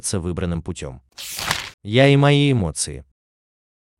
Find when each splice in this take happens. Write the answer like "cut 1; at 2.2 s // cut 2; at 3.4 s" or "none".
cut 1; at 1.7 s